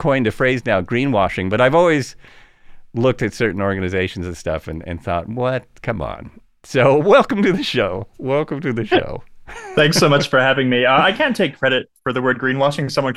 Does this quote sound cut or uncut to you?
uncut